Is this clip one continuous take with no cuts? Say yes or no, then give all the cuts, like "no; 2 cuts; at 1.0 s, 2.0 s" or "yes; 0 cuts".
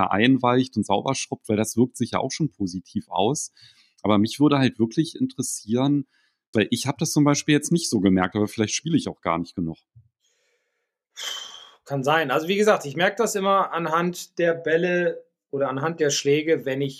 no; 1 cut; at 6.5 s